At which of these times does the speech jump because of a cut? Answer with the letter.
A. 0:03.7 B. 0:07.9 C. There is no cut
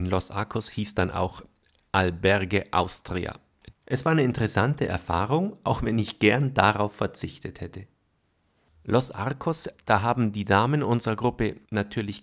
A